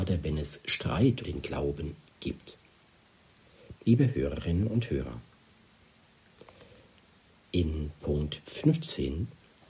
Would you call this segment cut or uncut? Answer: cut